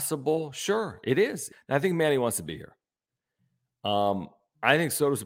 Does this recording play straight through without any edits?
no; 1 cut; at 1.5 s

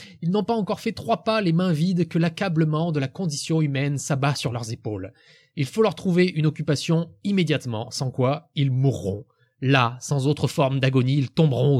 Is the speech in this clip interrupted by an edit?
no; 0 cuts

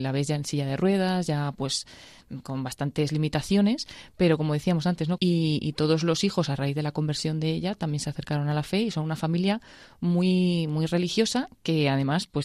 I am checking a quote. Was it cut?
yes; 1 cut; at 5.2 s

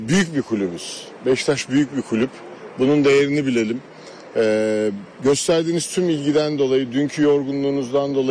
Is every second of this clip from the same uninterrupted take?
yes; 0 cuts

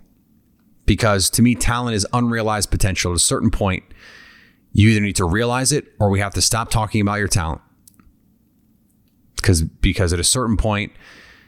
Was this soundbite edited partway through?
no; 0 cuts

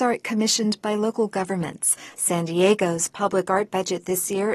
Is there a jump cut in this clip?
no; 0 cuts

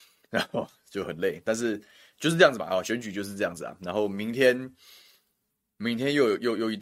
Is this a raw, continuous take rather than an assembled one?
yes; 0 cuts

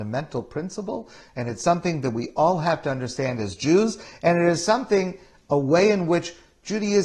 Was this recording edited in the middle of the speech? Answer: no; 0 cuts

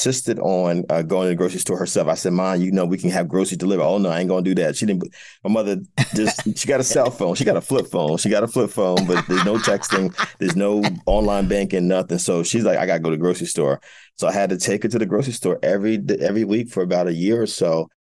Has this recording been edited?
no; 0 cuts

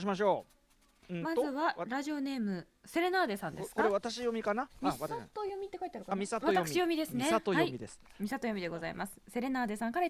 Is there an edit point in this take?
no; 0 cuts

